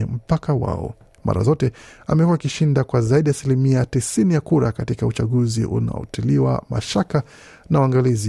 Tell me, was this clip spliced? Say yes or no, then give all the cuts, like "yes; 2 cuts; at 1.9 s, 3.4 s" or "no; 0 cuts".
yes; 1 cut; at 1.1 s